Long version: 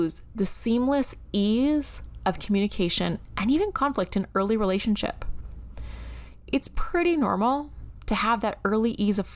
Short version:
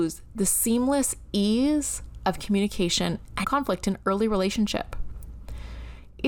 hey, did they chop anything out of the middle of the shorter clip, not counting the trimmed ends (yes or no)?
yes